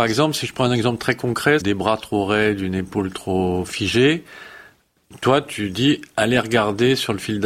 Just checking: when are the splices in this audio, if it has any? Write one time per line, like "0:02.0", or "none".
0:01.6

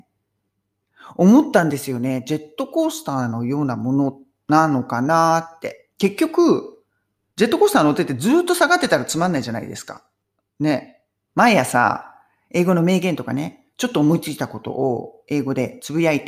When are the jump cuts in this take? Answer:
0:05.9
0:11.3

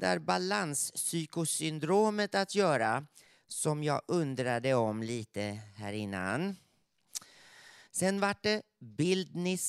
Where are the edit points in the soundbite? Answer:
0:07.9

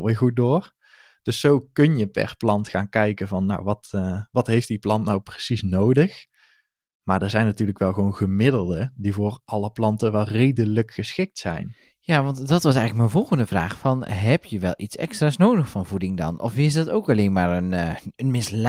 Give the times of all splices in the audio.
none

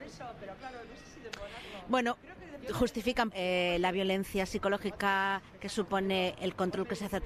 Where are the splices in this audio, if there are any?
0:03.3

